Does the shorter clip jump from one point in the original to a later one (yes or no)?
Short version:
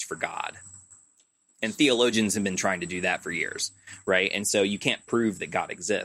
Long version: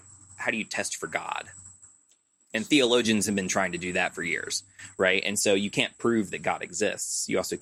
no